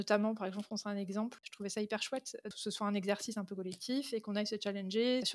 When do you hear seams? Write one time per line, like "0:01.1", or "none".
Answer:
0:01.4

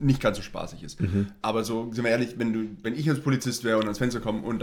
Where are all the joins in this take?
0:01.4
0:02.8

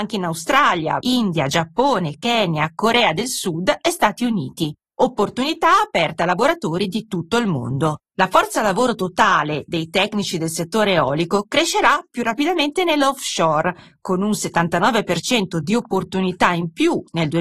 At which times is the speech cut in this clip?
0:01.0

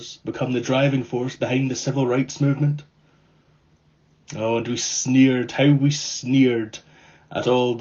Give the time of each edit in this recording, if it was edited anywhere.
none

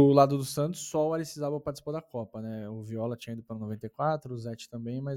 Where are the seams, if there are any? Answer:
none

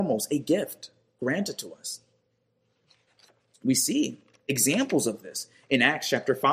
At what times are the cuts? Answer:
none

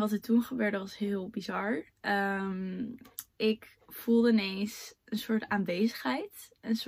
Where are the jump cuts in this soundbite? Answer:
0:03.3

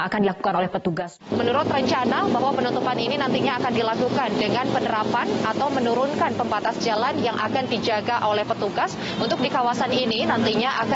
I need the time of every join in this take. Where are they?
0:01.3
0:09.2

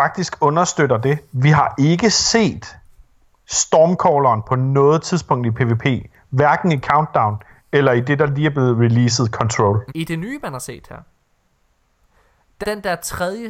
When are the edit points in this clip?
0:09.9
0:12.6

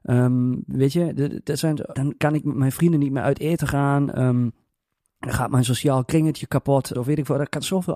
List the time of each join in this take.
0:01.9
0:06.9

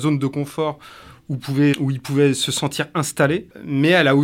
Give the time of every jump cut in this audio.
0:01.7

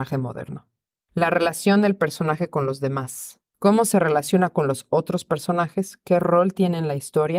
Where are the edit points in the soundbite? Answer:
none

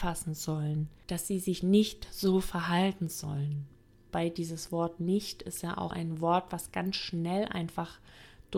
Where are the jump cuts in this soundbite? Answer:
0:04.1
0:05.9

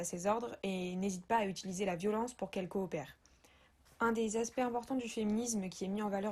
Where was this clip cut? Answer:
0:03.9

